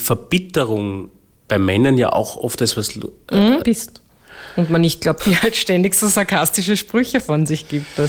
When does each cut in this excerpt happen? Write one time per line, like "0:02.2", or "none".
0:03.6
0:05.2